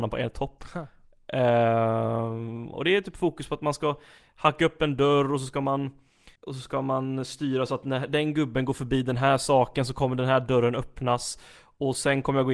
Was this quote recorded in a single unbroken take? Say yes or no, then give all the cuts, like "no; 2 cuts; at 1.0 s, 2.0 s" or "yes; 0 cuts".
no; 1 cut; at 6.4 s